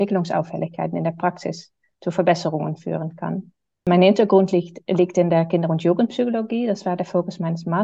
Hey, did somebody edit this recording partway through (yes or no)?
no